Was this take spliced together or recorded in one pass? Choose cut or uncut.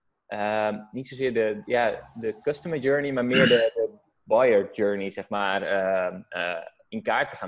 uncut